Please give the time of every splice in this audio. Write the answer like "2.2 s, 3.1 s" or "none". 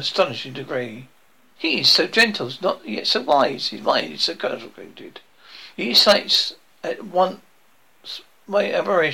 1.6 s, 5.7 s

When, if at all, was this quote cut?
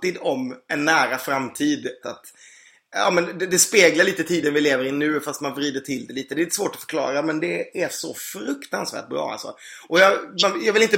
2.0 s

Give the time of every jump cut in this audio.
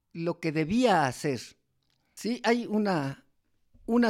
2.2 s

